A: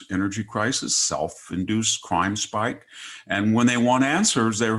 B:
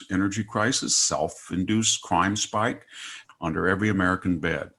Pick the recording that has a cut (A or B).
B